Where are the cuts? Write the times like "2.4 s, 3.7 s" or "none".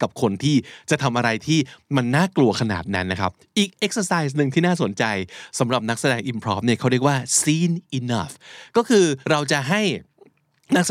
9.2 s

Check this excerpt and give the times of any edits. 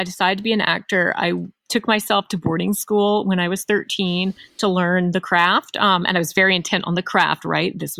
none

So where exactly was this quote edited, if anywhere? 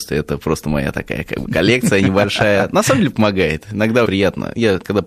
4.0 s

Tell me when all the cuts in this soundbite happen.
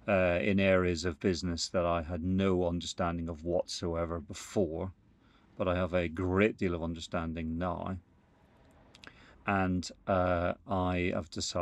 9.3 s

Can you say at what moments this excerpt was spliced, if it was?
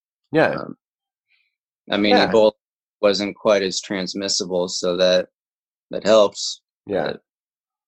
none

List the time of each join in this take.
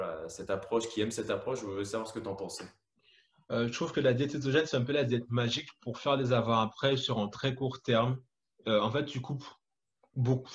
none

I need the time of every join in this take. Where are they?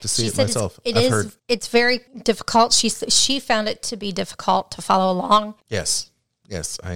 5.6 s

